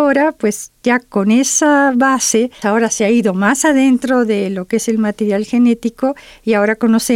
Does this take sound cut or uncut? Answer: cut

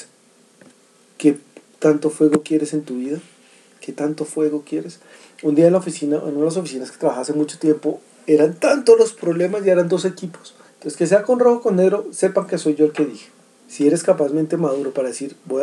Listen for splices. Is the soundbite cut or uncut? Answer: cut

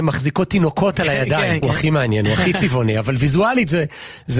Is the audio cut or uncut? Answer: cut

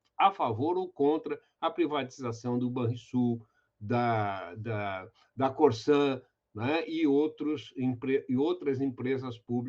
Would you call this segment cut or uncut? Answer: uncut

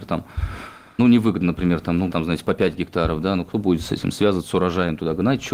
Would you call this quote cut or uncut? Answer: cut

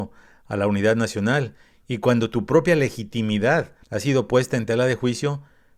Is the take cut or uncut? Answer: cut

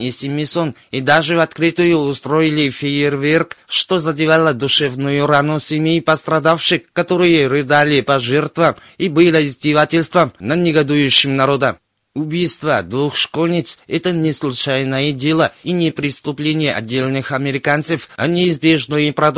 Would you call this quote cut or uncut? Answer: uncut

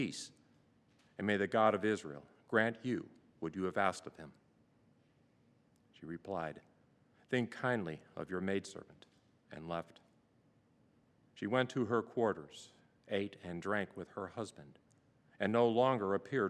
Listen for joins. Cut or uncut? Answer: uncut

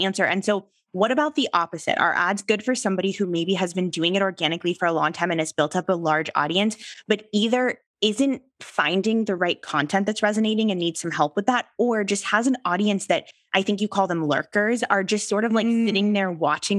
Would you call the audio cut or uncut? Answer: uncut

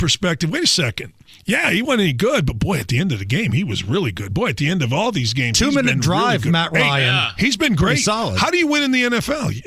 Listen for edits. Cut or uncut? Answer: uncut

